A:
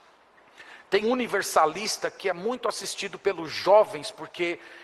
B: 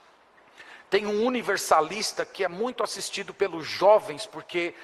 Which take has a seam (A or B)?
A